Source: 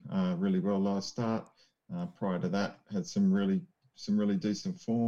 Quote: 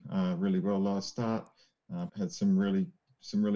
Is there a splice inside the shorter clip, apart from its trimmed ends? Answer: yes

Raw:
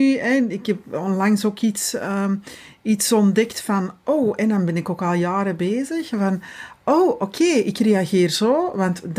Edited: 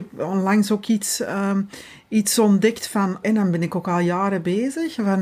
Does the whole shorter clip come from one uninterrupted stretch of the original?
no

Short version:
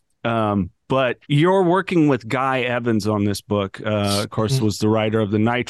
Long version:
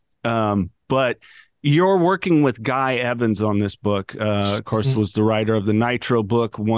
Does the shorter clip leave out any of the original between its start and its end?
yes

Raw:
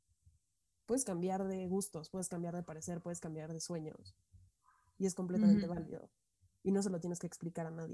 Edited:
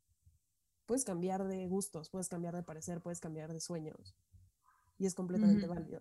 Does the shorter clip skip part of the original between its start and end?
no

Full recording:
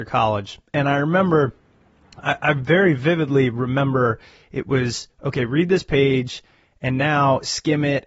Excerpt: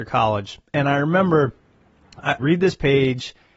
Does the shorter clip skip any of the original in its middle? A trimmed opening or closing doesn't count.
yes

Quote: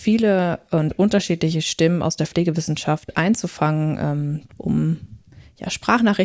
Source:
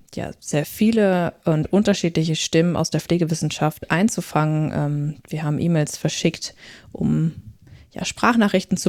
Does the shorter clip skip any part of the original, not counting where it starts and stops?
yes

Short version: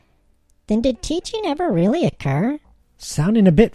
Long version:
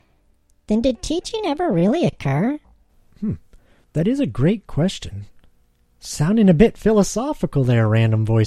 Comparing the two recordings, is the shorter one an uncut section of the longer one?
no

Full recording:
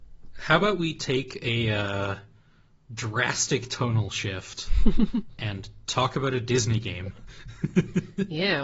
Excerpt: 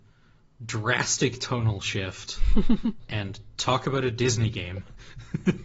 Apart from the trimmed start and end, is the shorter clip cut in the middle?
no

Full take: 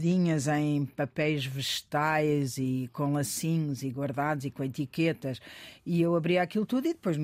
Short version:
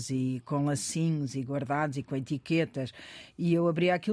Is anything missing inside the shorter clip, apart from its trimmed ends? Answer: no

